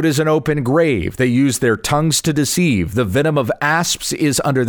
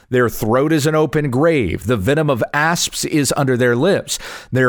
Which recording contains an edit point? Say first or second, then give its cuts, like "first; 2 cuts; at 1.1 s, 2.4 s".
second; 1 cut; at 1.8 s